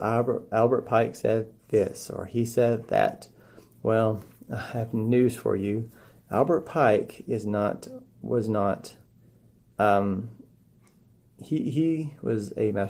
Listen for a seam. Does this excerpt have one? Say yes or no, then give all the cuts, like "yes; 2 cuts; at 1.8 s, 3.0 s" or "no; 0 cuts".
no; 0 cuts